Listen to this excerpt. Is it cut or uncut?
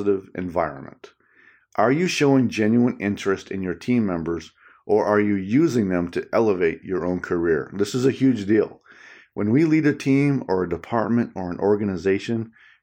uncut